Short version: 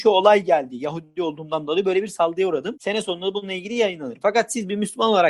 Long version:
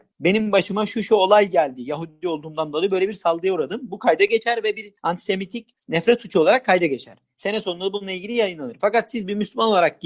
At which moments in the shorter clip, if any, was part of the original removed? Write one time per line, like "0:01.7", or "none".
0:02.7